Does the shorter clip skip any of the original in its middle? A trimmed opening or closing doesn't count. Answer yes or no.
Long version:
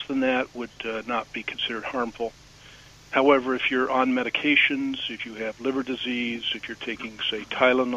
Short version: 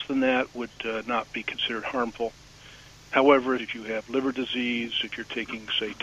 yes